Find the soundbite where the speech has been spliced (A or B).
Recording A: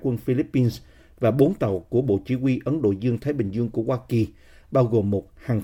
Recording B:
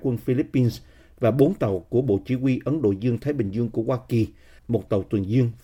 B